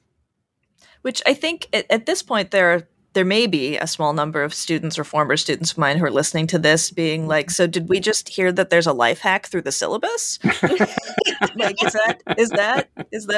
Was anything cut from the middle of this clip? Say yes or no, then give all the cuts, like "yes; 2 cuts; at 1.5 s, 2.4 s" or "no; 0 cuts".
no; 0 cuts